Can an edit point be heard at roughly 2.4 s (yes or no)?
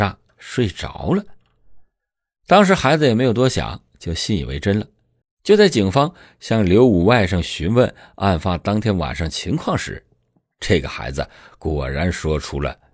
no